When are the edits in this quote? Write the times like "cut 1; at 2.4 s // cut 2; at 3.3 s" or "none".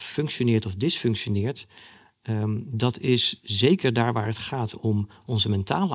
none